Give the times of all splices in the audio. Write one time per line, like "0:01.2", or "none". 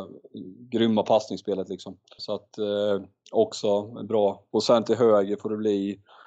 0:02.2
0:04.5